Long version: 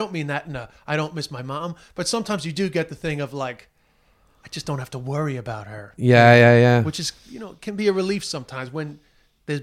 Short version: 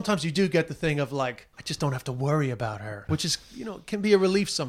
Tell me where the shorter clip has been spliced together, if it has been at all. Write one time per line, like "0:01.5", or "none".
0:01.5
0:03.1